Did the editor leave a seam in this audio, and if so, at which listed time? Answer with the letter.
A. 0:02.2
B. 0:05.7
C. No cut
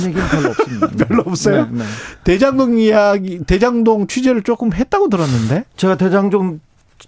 C